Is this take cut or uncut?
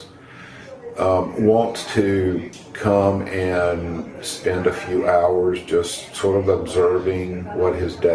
uncut